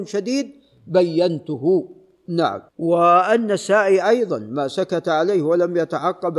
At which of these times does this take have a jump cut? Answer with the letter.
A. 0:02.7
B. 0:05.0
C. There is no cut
A